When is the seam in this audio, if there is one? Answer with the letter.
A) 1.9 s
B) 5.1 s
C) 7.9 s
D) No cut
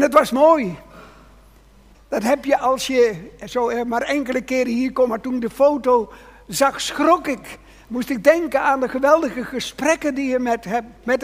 A